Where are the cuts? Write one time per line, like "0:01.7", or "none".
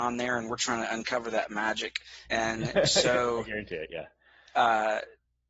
0:02.2